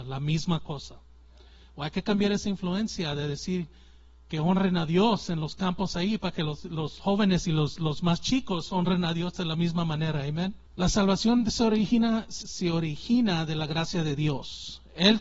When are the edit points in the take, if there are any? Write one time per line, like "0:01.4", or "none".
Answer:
0:10.7
0:12.4